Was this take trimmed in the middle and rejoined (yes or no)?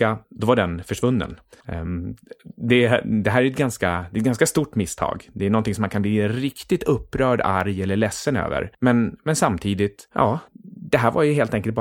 yes